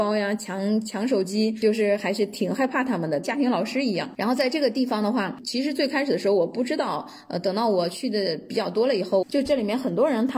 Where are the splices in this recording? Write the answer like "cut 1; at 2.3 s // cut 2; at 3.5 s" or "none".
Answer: cut 1; at 3.2 s // cut 2; at 9.2 s